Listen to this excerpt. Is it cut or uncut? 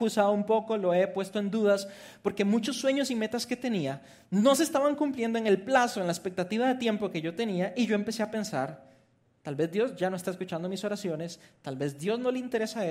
uncut